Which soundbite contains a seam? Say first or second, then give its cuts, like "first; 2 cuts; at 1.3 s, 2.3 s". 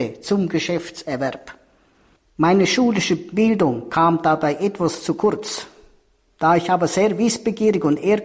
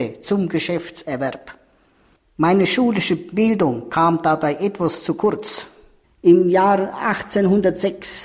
second; 1 cut; at 6.0 s